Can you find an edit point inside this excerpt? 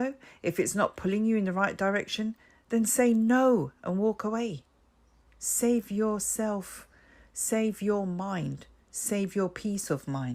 no; 0 cuts

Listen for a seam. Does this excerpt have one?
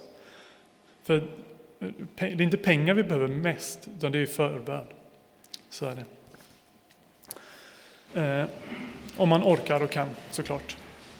yes; 1 cut; at 8.1 s

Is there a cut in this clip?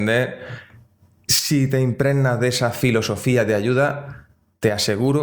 no; 0 cuts

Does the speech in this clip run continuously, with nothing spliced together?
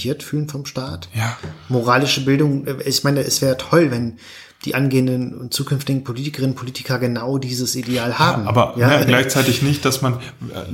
yes; 0 cuts

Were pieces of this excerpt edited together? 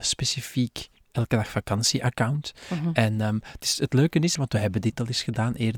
yes; 1 cut; at 4.3 s

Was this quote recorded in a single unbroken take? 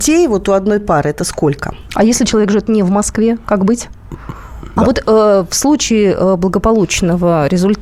no; 2 cuts; at 1.9 s, 4.8 s

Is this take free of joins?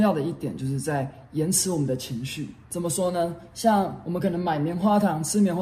yes; 0 cuts

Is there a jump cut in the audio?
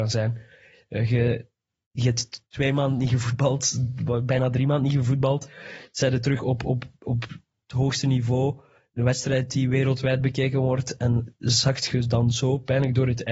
no; 0 cuts

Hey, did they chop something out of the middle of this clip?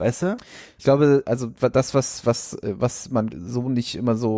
yes; 2 cuts; at 1.2 s, 3.3 s

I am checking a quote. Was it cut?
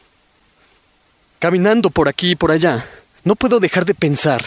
yes; 1 cut; at 3.2 s

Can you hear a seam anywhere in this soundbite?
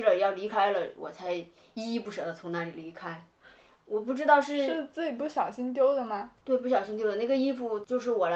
no; 0 cuts

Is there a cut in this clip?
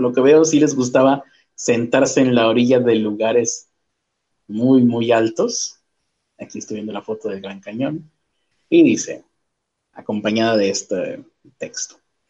no; 0 cuts

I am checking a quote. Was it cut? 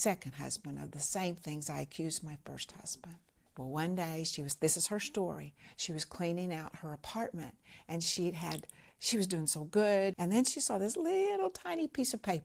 yes; 2 cuts; at 3.5 s, 10.1 s

